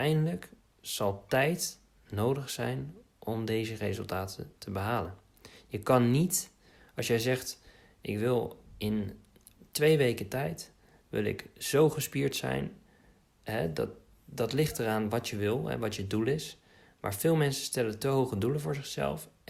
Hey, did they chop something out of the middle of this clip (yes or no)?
no